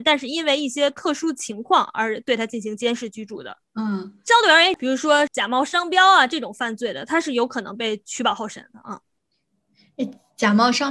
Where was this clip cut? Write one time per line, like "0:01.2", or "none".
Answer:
0:03.6
0:04.8

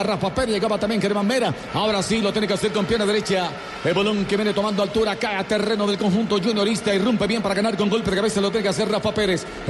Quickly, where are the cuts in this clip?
0:01.7

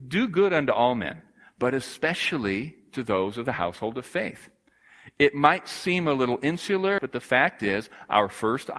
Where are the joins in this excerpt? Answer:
0:07.0

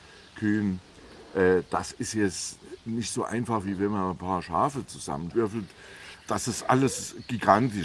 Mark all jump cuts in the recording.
none

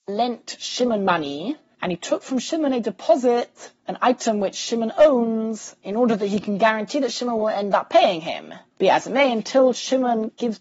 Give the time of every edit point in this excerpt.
0:08.7

